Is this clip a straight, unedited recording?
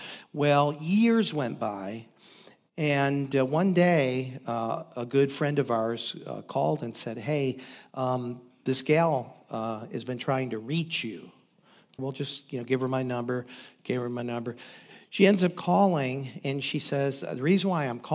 no; 1 cut; at 12.0 s

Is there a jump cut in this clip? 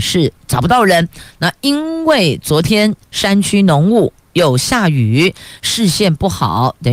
no; 0 cuts

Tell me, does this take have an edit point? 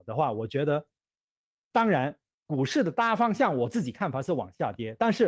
yes; 1 cut; at 2.3 s

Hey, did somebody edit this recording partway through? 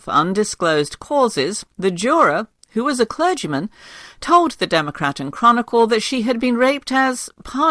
yes; 1 cut; at 1.7 s

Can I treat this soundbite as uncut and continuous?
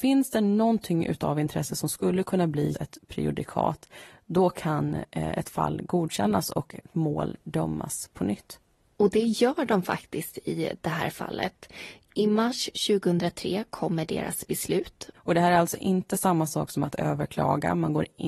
no; 2 cuts; at 2.7 s, 15.1 s

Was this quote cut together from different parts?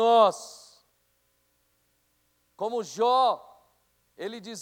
no; 0 cuts

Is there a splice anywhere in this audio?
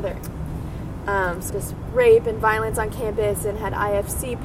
yes; 1 cut; at 1.5 s

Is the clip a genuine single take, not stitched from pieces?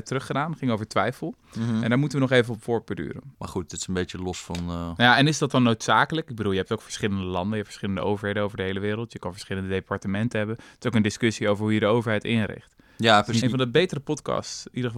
no; 2 cuts; at 3.3 s, 13.4 s

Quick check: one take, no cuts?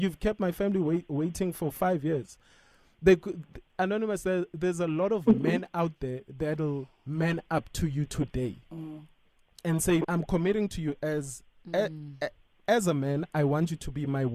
no; 1 cut; at 10.0 s

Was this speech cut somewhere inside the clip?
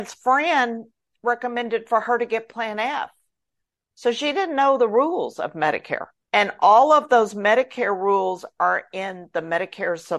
no; 0 cuts

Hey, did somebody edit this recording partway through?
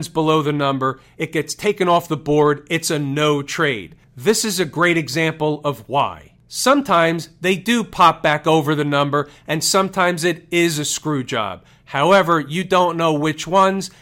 no; 0 cuts

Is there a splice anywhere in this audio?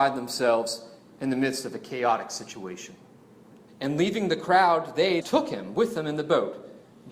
yes; 2 cuts; at 3.7 s, 5.2 s

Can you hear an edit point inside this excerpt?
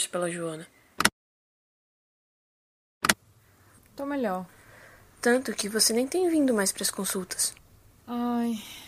yes; 1 cut; at 3.7 s

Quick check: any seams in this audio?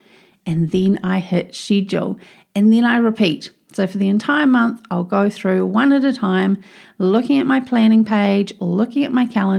no; 0 cuts

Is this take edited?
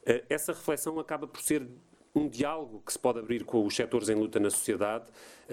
yes; 1 cut; at 3.5 s

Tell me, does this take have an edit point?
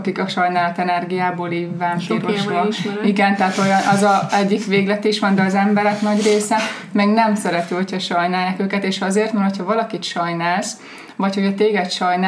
no; 0 cuts

